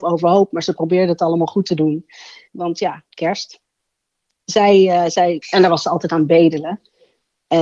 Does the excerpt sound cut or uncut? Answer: cut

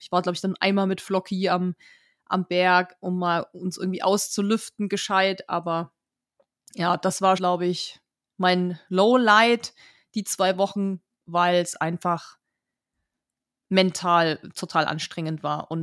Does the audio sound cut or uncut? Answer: cut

